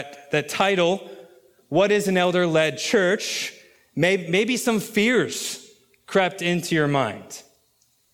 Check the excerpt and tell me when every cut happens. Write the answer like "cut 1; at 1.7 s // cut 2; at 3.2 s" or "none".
none